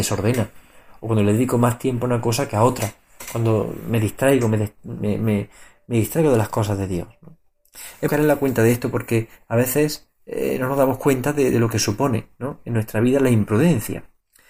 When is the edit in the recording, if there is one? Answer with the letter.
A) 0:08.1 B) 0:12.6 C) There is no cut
A